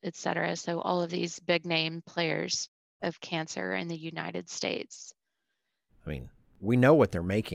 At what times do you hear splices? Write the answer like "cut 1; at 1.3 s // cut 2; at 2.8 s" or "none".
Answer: cut 1; at 3.0 s // cut 2; at 5.9 s